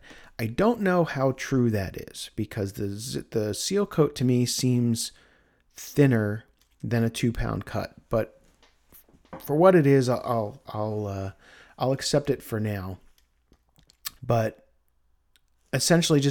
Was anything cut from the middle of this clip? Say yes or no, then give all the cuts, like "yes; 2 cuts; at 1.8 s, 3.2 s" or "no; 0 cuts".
yes; 1 cut; at 14.2 s